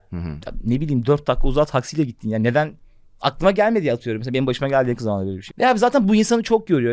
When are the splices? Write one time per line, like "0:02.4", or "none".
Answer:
0:05.5